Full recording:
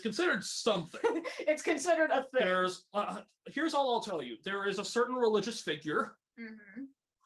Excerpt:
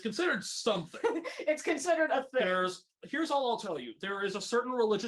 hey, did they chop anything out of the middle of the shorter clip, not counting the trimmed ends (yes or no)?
yes